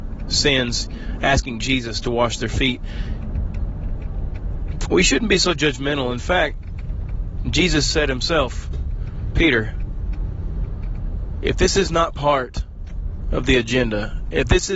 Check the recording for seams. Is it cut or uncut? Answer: uncut